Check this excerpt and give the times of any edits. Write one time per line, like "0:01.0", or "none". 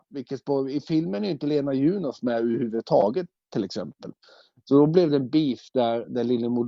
0:04.6

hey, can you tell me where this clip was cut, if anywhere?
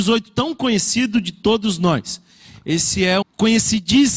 0:03.2

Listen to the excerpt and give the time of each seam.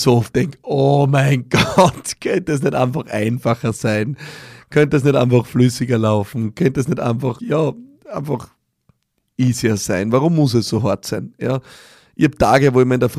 0:07.4

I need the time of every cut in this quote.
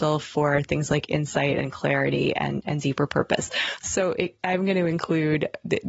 none

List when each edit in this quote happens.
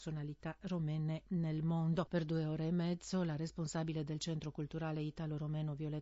0:02.1

